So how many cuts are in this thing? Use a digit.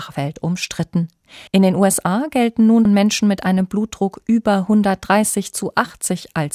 2